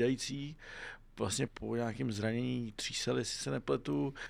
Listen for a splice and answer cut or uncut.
cut